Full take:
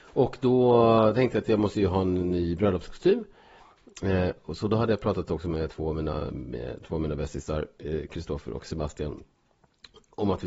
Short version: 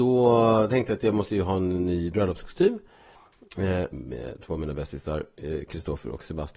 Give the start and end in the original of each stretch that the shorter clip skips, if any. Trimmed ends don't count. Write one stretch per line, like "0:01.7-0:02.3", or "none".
0:04.4-0:06.3